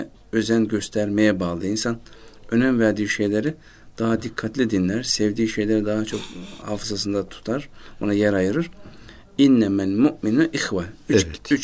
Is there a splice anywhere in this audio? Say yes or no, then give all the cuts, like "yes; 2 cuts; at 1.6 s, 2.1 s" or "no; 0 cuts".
no; 0 cuts